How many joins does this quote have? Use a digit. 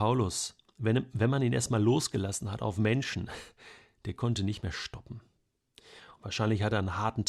1